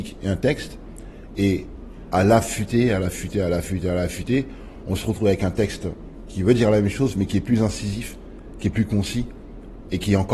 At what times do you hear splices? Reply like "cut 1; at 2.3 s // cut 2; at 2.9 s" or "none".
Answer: none